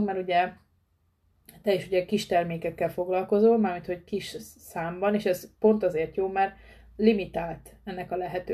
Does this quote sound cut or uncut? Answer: uncut